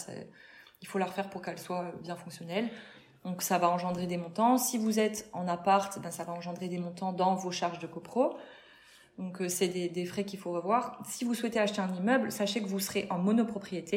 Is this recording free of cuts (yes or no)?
yes